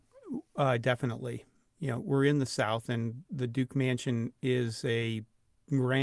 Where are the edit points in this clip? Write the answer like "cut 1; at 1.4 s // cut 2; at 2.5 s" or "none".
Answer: none